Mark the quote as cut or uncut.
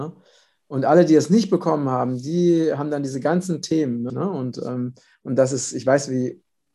cut